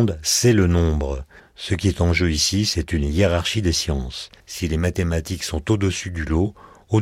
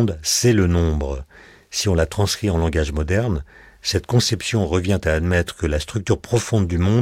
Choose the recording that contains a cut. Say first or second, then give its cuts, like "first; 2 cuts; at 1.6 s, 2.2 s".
first; 2 cuts; at 1.4 s, 4.4 s